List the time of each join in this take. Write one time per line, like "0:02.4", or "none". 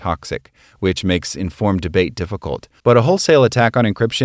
0:02.8